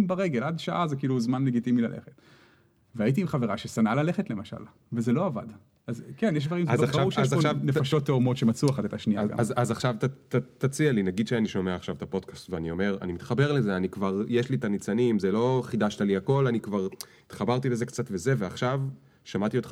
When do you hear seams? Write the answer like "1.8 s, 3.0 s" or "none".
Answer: 5.7 s